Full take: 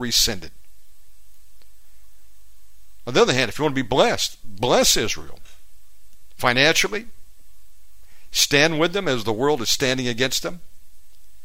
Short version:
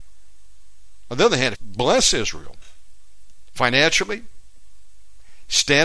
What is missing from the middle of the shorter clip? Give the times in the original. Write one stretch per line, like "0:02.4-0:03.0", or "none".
0:03.5-0:04.4